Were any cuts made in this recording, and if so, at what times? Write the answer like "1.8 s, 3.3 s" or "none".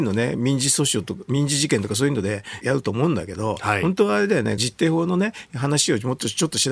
2.6 s, 4.6 s